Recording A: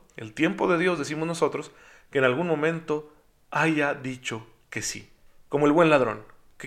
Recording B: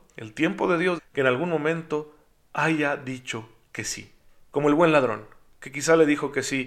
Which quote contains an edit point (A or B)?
B